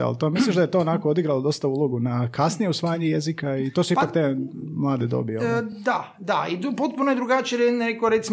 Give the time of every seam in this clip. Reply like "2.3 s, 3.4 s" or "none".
none